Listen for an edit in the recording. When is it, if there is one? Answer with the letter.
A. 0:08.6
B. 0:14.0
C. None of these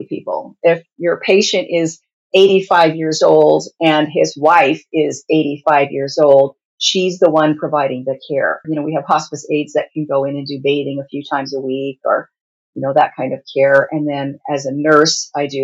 A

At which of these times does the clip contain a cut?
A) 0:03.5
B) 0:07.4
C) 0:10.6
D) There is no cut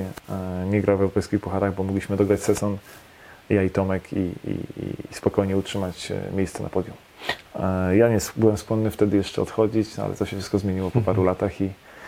B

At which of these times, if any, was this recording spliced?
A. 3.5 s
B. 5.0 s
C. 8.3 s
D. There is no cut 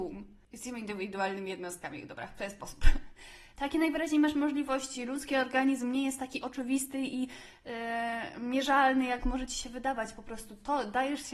A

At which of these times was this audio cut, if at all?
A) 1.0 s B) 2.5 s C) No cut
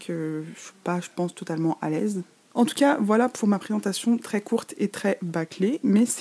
B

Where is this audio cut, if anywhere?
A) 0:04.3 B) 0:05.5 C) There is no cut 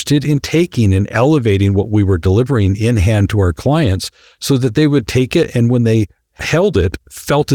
C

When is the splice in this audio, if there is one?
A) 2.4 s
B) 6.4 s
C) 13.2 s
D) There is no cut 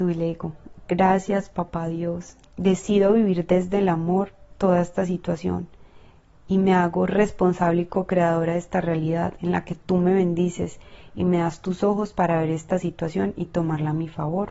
A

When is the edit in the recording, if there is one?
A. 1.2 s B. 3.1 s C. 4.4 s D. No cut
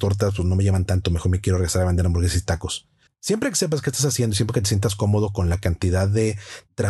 B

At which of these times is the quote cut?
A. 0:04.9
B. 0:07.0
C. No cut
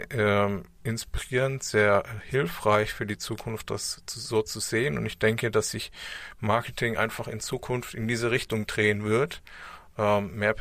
C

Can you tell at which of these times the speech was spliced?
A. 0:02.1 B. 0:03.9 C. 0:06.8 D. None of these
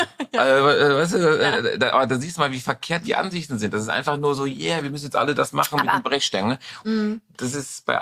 C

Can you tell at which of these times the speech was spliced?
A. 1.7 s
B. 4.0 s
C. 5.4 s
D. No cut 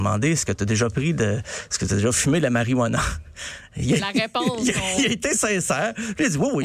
B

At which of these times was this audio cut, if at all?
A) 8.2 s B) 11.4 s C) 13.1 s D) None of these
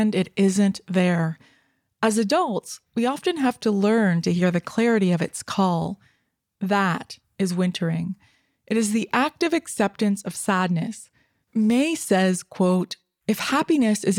B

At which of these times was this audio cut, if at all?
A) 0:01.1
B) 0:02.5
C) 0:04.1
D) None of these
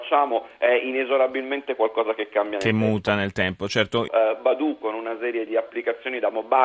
C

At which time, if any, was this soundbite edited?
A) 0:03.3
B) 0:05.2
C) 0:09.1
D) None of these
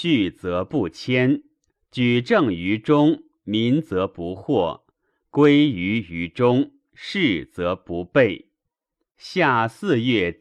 D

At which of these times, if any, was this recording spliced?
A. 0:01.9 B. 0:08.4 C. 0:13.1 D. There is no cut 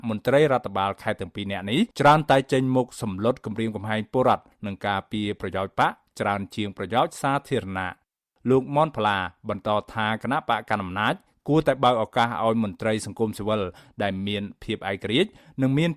A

